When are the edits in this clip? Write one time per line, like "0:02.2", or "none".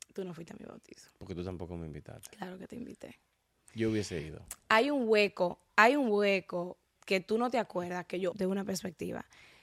0:07.0
0:08.3